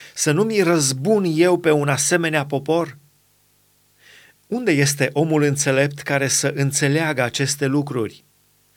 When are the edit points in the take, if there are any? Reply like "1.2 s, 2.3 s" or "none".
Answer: 4.4 s